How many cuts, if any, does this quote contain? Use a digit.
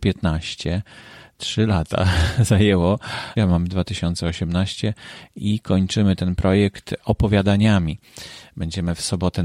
1